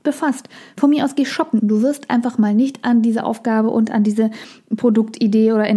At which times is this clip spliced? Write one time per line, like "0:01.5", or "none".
0:01.6

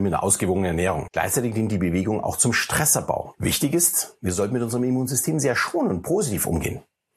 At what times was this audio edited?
0:01.1
0:03.3

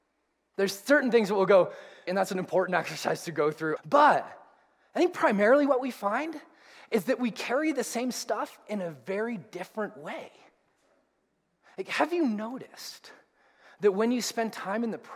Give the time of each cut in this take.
0:02.1
0:03.8

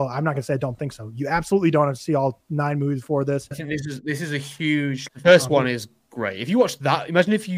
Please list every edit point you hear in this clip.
0:03.5
0:05.1

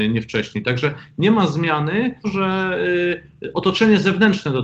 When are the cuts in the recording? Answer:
0:02.2

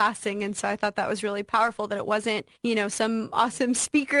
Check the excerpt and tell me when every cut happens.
0:02.6

